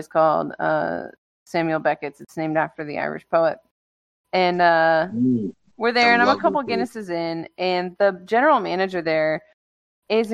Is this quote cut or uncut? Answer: uncut